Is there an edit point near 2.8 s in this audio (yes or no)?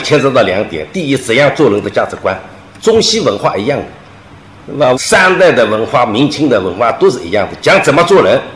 no